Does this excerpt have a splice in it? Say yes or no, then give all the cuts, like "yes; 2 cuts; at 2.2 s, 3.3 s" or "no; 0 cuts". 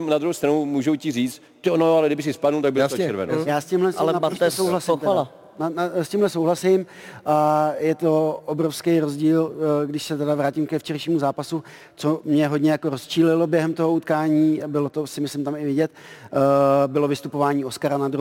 no; 0 cuts